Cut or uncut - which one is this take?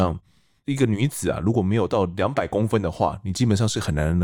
uncut